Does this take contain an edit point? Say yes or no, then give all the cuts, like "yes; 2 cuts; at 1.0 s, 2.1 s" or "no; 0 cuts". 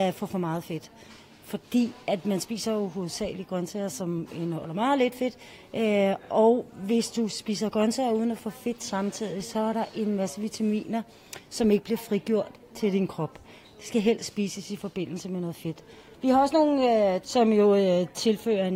yes; 2 cuts; at 16.1 s, 17.2 s